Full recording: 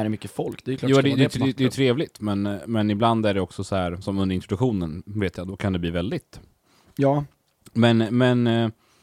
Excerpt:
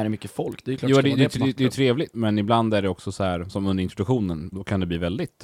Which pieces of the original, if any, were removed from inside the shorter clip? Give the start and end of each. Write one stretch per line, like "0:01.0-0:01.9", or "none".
0:02.1-0:02.7
0:05.0-0:05.4